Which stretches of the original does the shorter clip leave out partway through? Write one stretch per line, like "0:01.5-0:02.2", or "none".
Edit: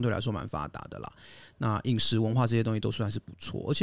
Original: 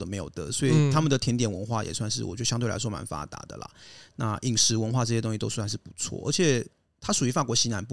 none